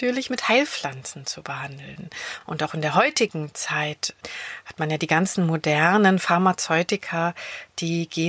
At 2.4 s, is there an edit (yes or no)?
no